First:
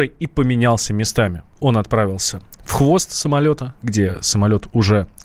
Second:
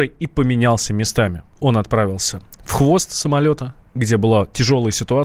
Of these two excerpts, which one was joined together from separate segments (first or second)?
first